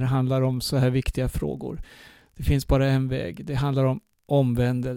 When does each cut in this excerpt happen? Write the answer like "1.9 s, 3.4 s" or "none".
none